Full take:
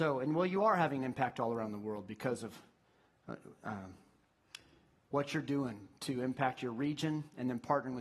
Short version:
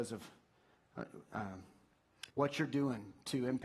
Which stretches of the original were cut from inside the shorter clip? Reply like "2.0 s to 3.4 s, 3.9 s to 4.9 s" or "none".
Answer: 4.6 s to 5.1 s